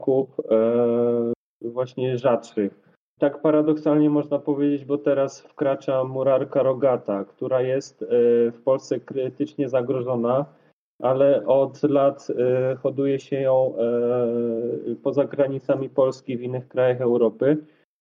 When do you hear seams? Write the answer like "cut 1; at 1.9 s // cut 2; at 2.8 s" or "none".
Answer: cut 1; at 3.2 s